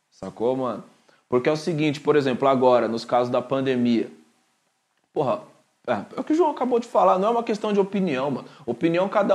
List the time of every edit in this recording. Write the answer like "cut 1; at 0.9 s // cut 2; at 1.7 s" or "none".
none